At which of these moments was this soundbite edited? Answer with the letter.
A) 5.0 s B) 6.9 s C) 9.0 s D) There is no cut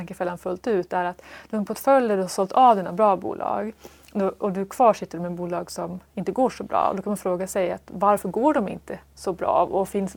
D